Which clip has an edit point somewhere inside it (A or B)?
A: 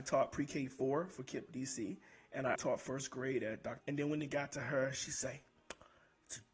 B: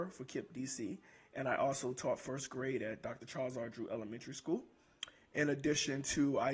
A